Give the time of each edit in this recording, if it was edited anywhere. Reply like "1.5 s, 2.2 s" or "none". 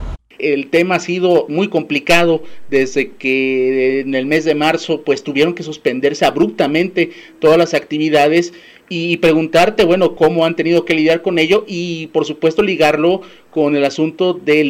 10.2 s